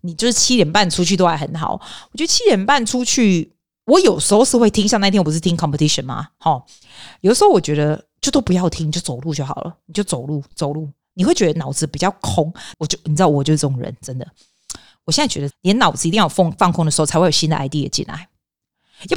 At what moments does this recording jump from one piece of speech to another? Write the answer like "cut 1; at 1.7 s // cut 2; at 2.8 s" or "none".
cut 1; at 12.7 s // cut 2; at 15.5 s

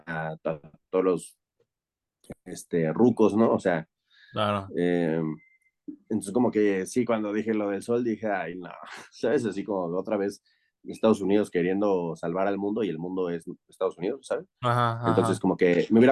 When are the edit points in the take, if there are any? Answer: none

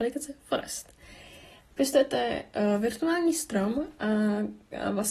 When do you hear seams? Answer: none

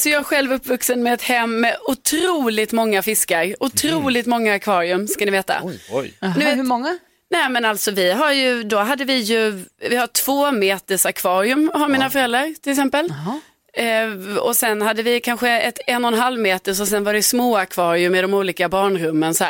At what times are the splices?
none

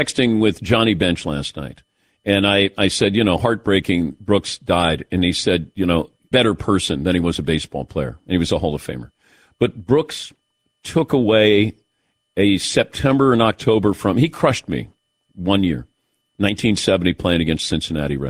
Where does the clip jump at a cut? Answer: cut 1; at 6.3 s

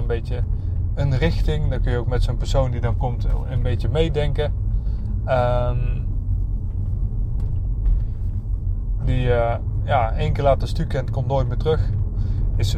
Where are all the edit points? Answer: cut 1; at 9.0 s

